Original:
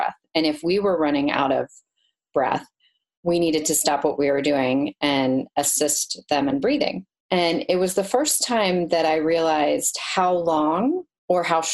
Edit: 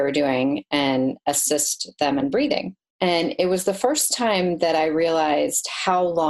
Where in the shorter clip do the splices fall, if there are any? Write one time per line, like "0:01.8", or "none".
none